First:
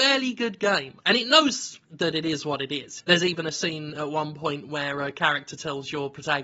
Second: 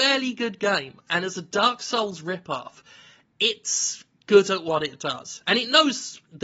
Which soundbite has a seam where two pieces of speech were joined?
first; 2 cuts; at 1.0 s, 3.0 s

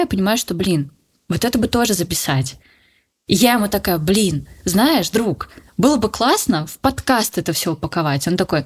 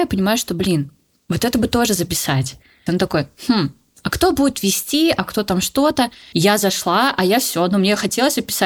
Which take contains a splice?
second; 2 cuts; at 2.9 s, 6.3 s

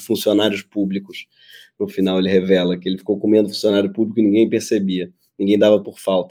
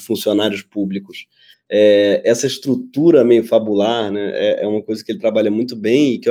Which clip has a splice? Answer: second; 1 cut; at 1.5 s

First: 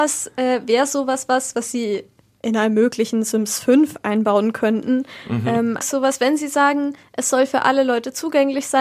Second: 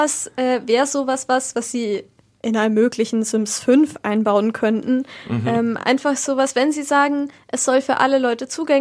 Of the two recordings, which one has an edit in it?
first; 1 cut; at 5.8 s

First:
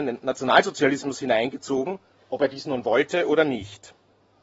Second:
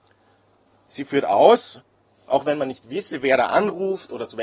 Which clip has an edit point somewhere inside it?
second; 1 cut; at 2.3 s

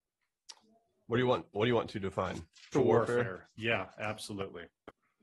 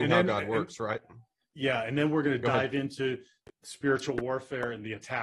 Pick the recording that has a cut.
first; 1 cut; at 2.7 s

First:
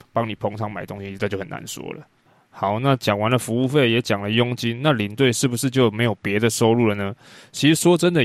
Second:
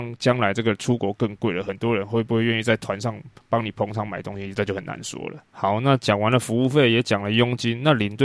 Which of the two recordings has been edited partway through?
second; 1 cut; at 5.5 s

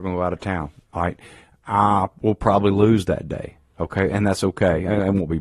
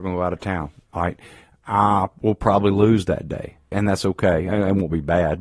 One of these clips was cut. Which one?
second; 1 cut; at 3.7 s

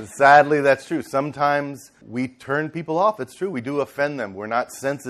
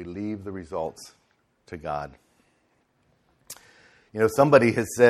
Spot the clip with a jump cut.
first; 1 cut; at 2.0 s

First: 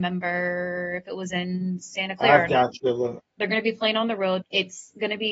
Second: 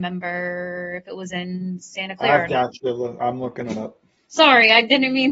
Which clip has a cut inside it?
first; 2 cuts; at 3.2 s, 4.4 s

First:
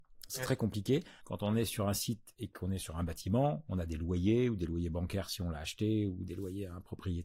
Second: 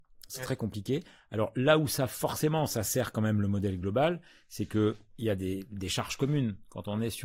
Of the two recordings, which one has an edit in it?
first; 1 cut; at 1.2 s

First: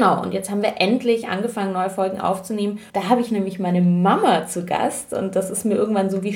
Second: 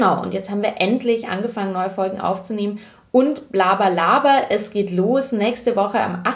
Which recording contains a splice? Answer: first; 1 cut; at 2.9 s

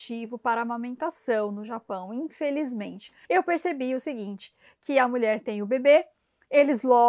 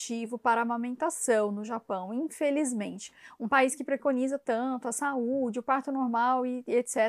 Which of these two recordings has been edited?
first; 1 cut; at 3.2 s

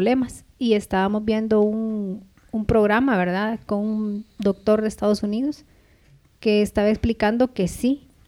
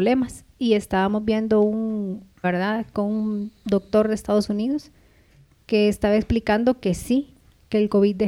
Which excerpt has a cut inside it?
second; 1 cut; at 2.4 s

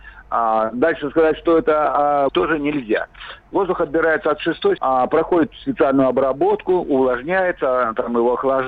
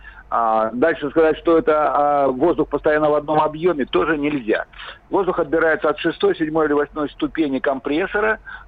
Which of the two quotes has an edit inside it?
first; 2 cuts; at 2.3 s, 4.8 s

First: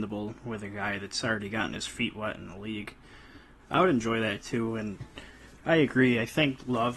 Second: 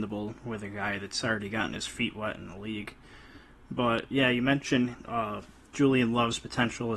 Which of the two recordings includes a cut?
first; 1 cut; at 3.6 s

